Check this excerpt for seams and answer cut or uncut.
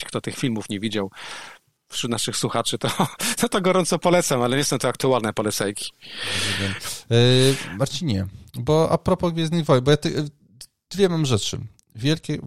uncut